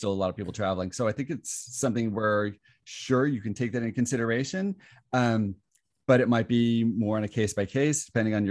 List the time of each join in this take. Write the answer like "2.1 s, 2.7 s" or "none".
none